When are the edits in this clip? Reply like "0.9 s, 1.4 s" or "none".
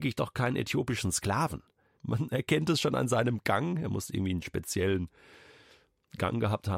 1.9 s